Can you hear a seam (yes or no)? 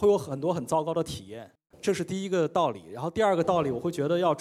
no